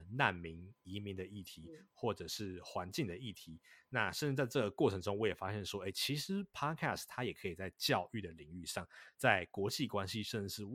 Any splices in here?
no; 0 cuts

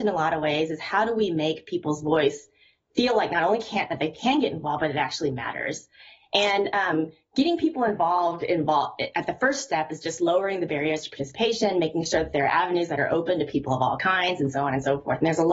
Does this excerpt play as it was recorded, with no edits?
yes; 0 cuts

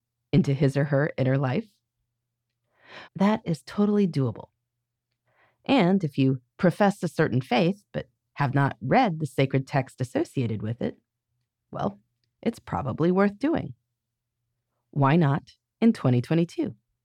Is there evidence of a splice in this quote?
yes; 1 cut; at 3.0 s

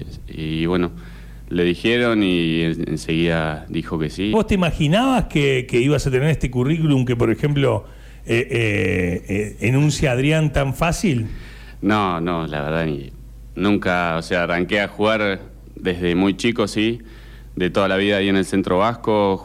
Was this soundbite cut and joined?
yes; 1 cut; at 4.3 s

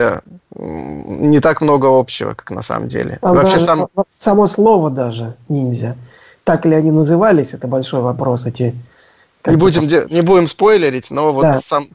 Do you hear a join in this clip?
no; 0 cuts

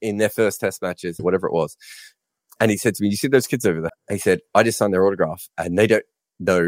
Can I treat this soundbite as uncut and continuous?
no; 2 cuts; at 1.2 s, 3.9 s

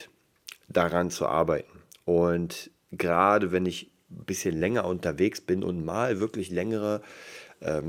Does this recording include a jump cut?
no; 0 cuts

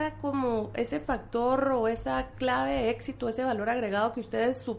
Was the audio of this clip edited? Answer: no; 0 cuts

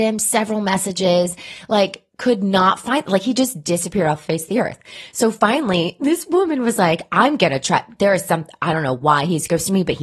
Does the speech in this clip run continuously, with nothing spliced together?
yes; 0 cuts

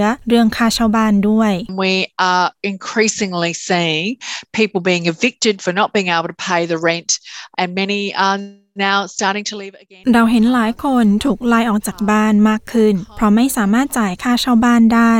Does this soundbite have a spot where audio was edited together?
yes; 1 cut; at 7.5 s

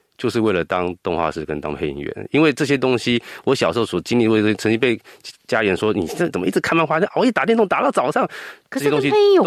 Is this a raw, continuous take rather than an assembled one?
yes; 0 cuts

